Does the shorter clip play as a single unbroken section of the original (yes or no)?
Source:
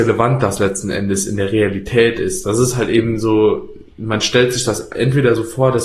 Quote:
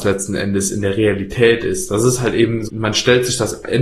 no